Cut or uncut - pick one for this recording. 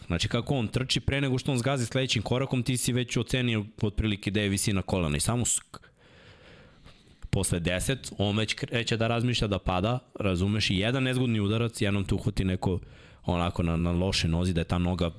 cut